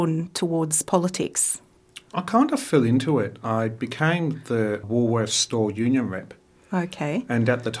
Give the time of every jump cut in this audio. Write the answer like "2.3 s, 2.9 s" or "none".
4.8 s